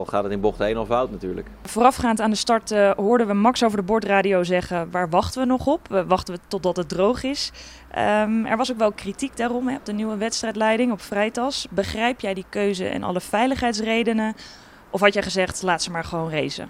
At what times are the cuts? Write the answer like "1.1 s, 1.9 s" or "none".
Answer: none